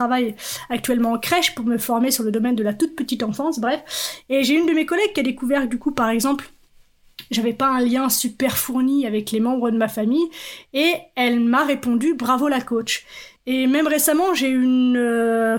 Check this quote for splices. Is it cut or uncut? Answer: cut